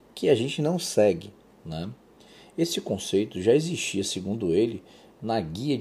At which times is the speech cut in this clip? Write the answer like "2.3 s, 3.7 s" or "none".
none